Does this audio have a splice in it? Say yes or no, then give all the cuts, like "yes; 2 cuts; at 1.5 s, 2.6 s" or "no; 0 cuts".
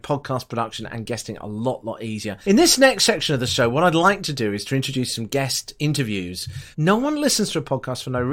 yes; 2 cuts; at 2.4 s, 6.7 s